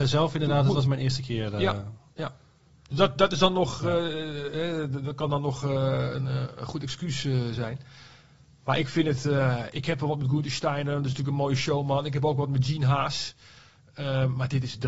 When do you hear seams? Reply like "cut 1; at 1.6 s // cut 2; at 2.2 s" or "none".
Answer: none